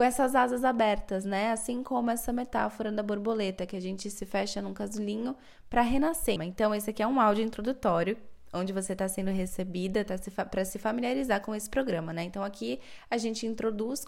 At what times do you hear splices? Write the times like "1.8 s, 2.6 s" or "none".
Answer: 6.4 s